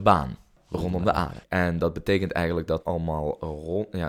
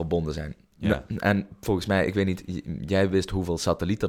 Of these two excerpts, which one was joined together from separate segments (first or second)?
first